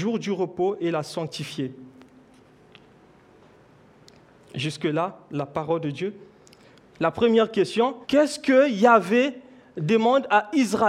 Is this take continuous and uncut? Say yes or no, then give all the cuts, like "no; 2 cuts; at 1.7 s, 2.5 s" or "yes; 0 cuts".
no; 2 cuts; at 6.9 s, 8.0 s